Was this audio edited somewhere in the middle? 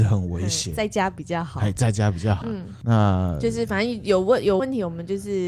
yes; 2 cuts; at 2.4 s, 4.6 s

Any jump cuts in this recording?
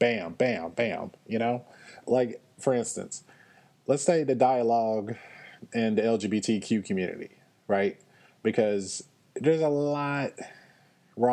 yes; 1 cut; at 2.0 s

